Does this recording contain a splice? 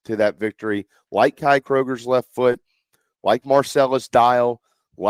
no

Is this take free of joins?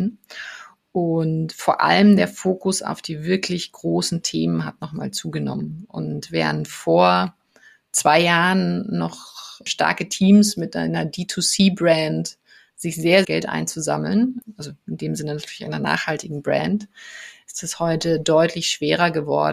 no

